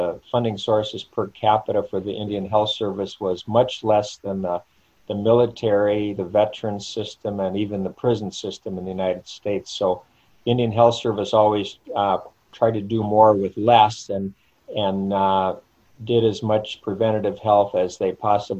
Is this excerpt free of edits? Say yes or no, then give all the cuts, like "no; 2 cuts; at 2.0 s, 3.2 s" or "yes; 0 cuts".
yes; 0 cuts